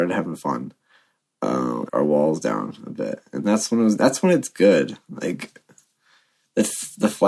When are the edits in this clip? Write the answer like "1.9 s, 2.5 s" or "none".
1.9 s